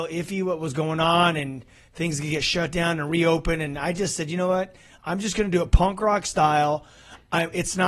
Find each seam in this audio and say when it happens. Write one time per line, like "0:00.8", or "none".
none